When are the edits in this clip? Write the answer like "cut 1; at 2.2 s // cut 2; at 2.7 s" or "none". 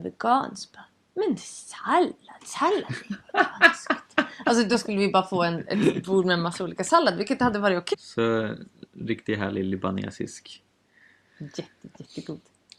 cut 1; at 7.9 s // cut 2; at 11.3 s